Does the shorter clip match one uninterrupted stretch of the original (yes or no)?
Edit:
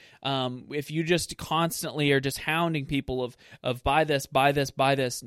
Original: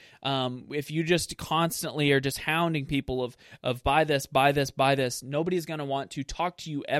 yes